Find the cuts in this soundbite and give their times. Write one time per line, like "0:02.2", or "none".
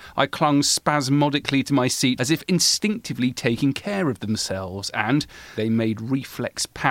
0:02.2
0:05.6